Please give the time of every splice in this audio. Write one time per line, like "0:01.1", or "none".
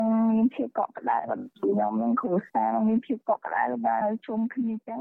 0:04.0